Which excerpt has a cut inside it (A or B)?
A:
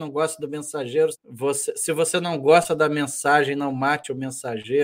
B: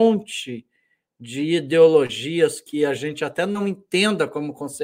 A